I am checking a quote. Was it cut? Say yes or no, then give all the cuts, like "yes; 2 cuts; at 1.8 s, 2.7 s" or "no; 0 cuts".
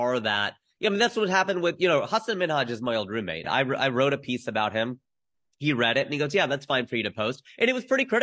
yes; 1 cut; at 3.4 s